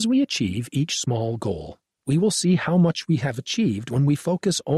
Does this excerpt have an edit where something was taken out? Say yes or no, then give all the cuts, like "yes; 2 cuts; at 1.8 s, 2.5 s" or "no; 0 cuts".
yes; 1 cut; at 2.0 s